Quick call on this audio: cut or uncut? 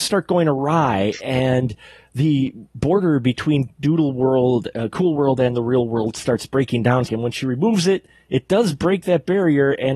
cut